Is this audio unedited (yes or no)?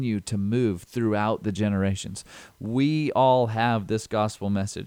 yes